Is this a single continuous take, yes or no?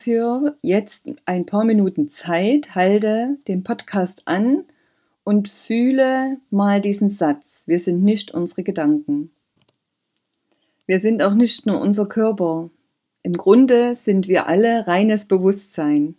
yes